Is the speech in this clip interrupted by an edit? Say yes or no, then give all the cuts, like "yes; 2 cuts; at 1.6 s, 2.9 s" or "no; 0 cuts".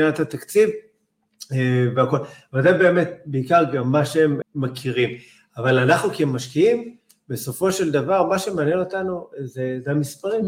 yes; 1 cut; at 4.4 s